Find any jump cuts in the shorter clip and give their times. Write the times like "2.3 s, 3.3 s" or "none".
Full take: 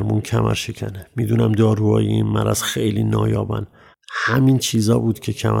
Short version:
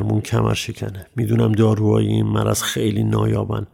none

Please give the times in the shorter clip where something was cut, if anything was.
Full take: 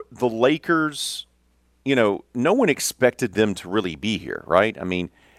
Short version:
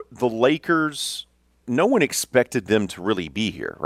1.6 s

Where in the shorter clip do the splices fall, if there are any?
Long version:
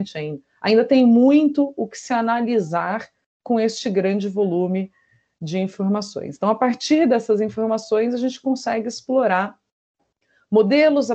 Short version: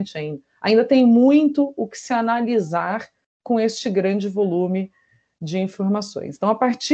none

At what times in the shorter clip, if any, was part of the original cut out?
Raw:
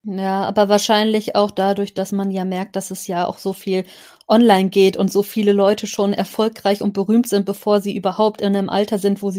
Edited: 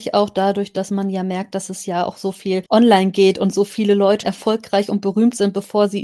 2.7 s, 4.2 s

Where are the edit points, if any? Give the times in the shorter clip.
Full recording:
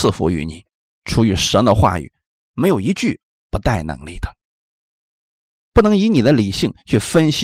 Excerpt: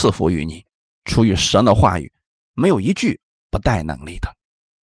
none

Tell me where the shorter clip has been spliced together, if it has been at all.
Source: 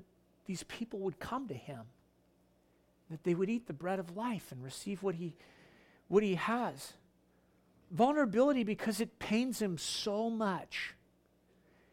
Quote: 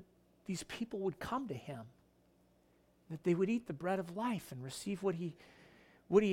none

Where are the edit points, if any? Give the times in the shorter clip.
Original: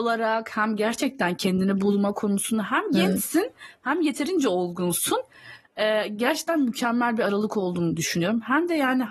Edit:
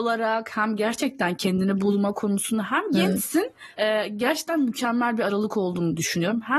3.8 s

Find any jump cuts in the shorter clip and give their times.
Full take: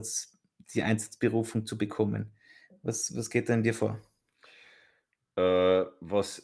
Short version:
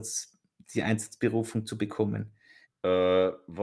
2.6 s

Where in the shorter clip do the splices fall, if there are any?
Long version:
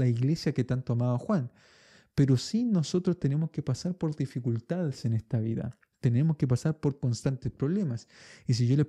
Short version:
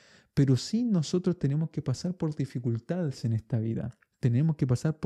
none

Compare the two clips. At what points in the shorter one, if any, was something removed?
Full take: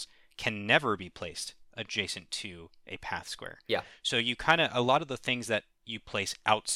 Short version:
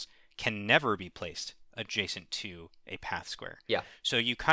none

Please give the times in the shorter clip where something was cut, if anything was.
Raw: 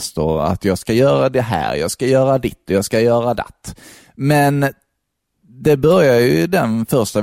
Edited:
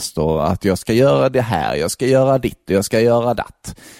none

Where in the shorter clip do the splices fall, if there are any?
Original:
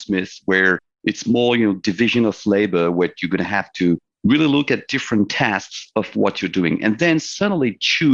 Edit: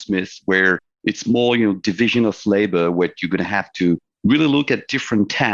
none

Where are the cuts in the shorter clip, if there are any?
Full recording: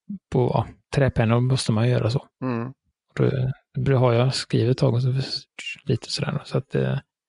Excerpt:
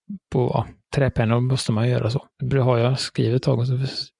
2.3 s

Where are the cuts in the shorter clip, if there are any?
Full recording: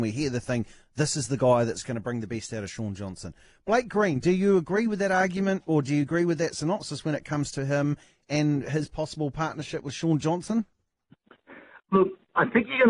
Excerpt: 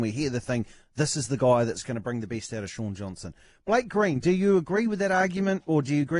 none

